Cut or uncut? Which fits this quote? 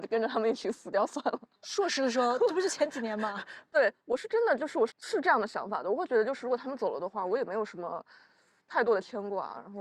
cut